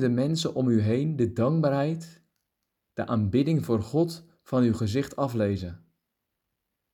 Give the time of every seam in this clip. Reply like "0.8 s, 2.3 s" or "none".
none

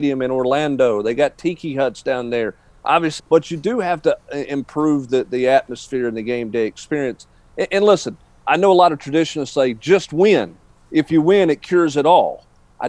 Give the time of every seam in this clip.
3.2 s

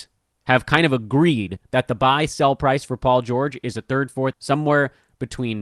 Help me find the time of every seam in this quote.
4.3 s

